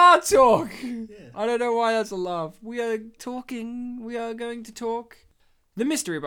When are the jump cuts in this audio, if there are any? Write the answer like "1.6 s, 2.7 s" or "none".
none